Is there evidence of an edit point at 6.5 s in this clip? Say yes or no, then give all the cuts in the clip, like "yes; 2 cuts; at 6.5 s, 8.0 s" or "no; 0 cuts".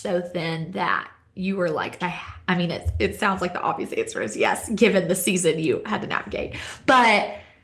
no; 1 cut; at 2.0 s